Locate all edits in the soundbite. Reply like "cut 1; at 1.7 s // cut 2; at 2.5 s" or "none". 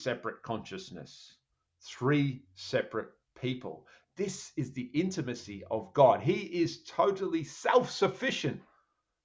none